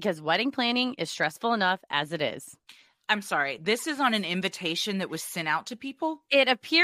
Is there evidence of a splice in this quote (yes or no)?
no